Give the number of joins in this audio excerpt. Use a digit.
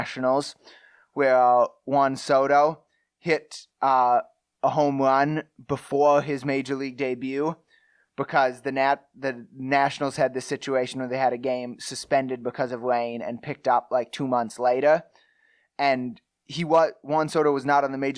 0